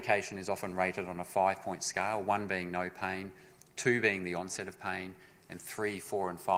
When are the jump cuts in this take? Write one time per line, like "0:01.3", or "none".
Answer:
none